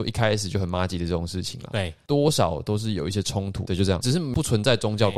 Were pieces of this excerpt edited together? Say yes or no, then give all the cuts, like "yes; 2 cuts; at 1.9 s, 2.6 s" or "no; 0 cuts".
yes; 1 cut; at 3.6 s